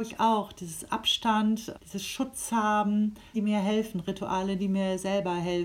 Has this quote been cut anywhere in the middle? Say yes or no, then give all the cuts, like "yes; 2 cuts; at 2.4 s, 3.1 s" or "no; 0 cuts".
yes; 2 cuts; at 1.7 s, 3.3 s